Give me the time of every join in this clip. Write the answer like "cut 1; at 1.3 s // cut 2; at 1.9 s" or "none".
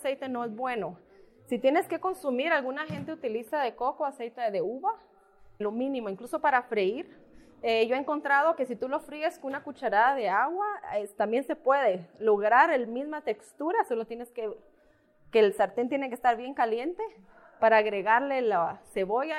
cut 1; at 5.6 s